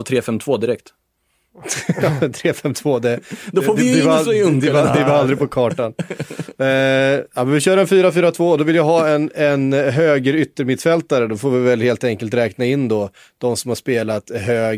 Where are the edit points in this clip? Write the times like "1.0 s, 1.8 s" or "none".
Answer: none